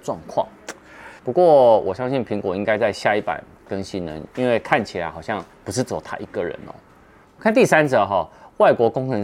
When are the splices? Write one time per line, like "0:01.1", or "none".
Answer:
0:01.2
0:04.3
0:07.2